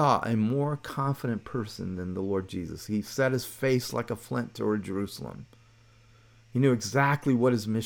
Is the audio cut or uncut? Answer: uncut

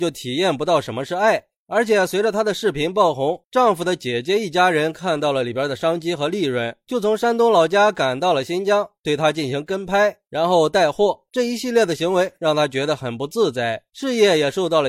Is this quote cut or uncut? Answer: uncut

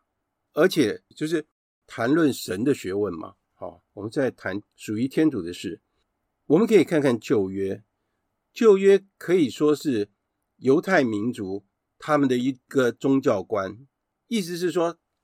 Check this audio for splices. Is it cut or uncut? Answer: cut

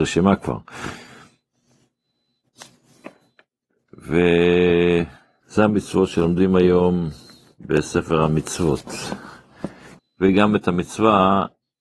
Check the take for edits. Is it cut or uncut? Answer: cut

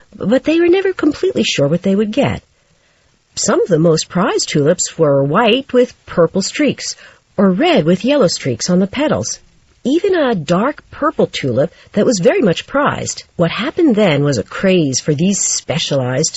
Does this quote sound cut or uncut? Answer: cut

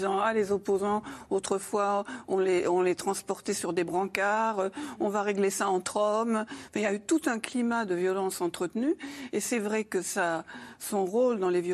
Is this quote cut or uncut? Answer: uncut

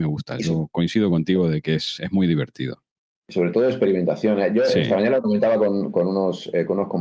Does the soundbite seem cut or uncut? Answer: uncut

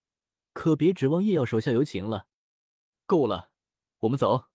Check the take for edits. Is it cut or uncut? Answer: uncut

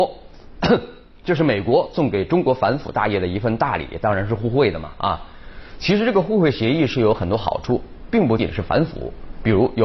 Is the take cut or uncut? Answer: cut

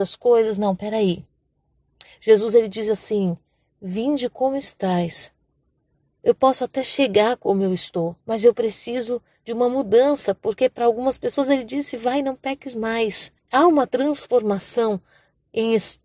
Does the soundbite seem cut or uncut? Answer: cut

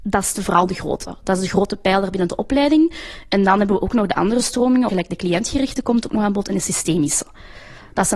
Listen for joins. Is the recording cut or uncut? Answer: cut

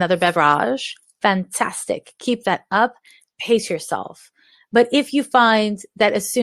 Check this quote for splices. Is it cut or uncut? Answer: uncut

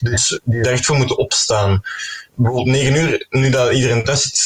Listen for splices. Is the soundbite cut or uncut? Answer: cut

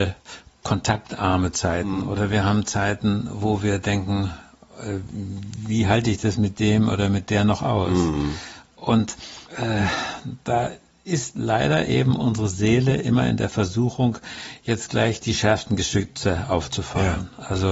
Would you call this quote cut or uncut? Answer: cut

